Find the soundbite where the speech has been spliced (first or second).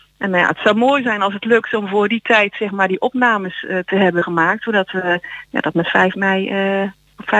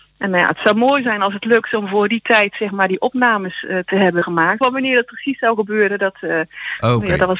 second